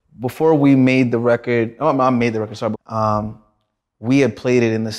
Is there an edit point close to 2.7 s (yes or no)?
yes